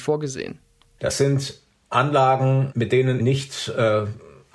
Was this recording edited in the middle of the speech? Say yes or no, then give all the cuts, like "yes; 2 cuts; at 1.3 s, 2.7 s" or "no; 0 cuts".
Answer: yes; 2 cuts; at 1.0 s, 3.2 s